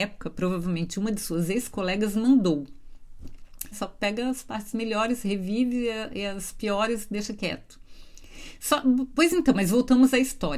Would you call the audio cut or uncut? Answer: cut